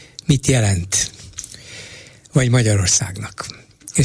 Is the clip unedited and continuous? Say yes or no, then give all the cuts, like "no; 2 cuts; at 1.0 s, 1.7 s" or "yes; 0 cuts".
yes; 0 cuts